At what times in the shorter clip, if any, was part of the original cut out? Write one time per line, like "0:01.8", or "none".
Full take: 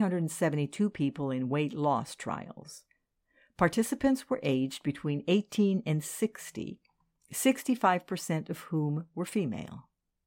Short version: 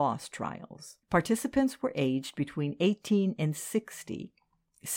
0:01.0